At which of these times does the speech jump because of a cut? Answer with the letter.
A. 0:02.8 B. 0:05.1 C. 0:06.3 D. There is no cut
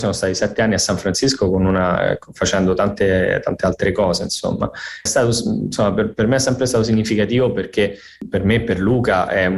B